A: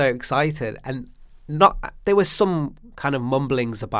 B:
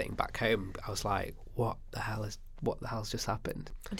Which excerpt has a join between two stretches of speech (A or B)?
A